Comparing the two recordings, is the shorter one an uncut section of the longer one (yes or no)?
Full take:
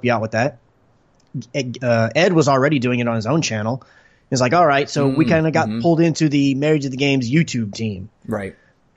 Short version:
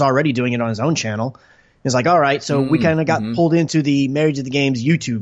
yes